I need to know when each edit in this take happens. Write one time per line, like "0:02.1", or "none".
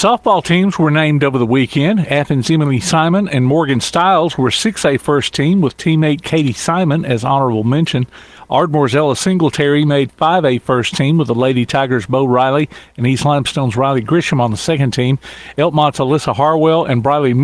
none